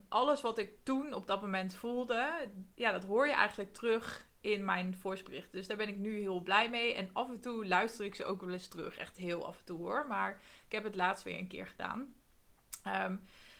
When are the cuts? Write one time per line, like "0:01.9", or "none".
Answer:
0:02.7